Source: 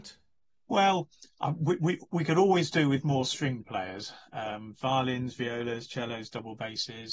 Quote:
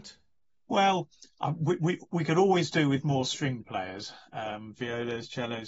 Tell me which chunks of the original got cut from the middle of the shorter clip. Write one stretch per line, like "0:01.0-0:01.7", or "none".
0:04.8-0:05.3

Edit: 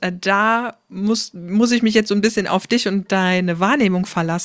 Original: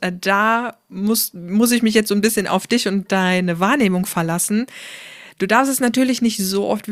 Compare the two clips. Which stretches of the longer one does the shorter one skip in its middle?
none

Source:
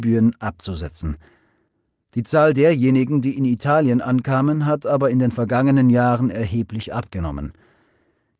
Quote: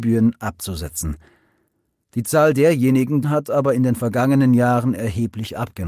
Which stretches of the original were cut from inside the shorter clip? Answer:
0:03.2-0:04.6

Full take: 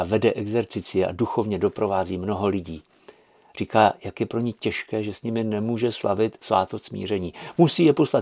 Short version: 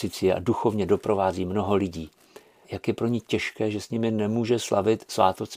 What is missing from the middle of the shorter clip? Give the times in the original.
0:03.4-0:04.0

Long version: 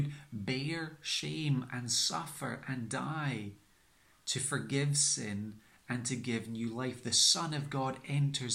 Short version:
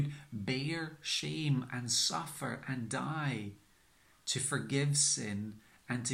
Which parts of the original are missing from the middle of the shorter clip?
none

